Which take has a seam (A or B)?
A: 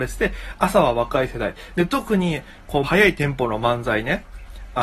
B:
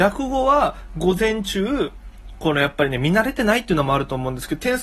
A